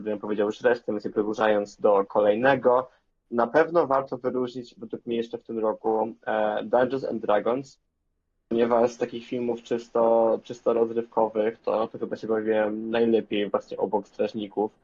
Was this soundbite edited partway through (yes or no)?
no